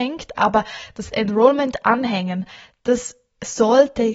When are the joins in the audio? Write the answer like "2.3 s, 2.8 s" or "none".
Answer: none